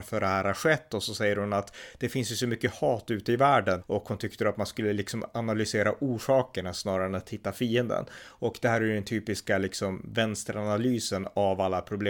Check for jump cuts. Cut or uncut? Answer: cut